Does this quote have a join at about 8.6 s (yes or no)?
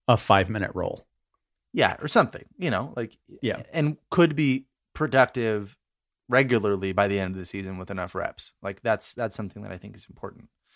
no